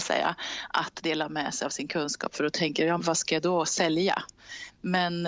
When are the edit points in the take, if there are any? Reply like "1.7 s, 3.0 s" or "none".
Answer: 3.0 s